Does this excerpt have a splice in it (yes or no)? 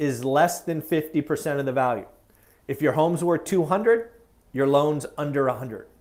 no